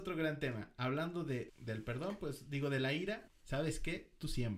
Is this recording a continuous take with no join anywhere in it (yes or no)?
no